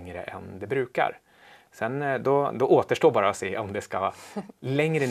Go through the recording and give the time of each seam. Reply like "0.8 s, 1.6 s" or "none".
none